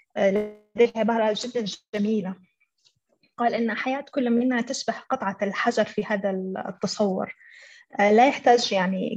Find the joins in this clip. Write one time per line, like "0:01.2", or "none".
none